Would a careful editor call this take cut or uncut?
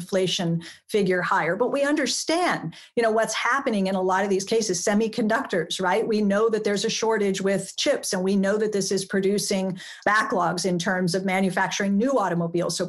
uncut